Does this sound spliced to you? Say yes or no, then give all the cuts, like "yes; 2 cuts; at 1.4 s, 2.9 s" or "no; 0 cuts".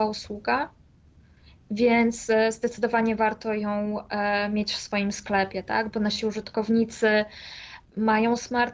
no; 0 cuts